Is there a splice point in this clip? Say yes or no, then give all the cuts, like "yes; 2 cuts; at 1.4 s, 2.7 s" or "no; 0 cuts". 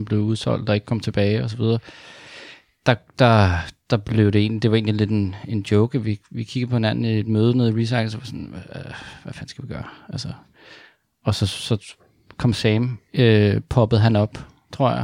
no; 0 cuts